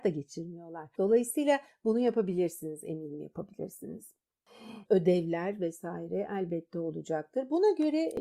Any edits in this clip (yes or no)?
yes